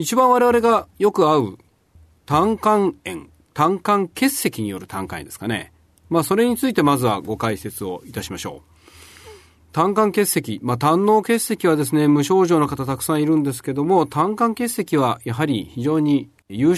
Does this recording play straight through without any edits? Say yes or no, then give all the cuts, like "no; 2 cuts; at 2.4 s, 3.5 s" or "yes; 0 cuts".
yes; 0 cuts